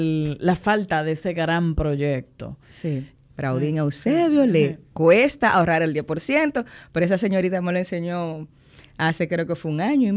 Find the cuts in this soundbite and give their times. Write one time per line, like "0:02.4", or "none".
0:03.2